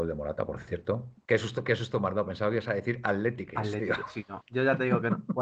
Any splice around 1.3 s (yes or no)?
yes